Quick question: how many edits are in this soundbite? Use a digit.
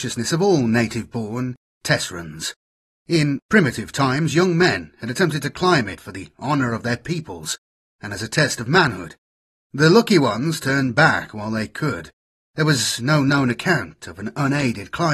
0